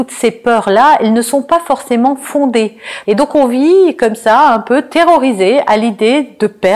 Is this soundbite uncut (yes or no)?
no